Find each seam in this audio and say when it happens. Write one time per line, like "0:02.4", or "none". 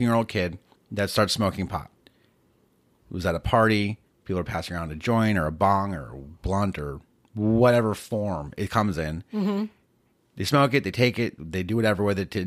0:03.0